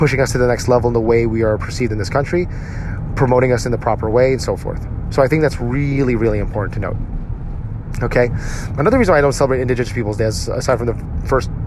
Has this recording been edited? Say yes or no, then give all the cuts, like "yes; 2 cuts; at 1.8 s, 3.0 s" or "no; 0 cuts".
no; 0 cuts